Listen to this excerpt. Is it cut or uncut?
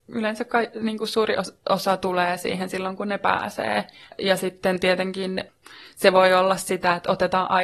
cut